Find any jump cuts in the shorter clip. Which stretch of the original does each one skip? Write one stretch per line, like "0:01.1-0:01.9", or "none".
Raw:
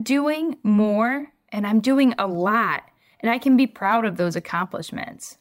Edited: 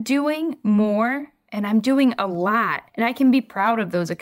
0:02.9-0:03.1